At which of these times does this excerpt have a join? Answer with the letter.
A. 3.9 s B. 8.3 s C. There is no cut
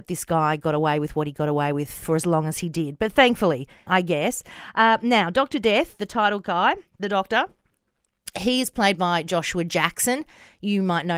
A